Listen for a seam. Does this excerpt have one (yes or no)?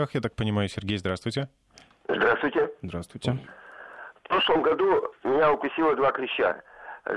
no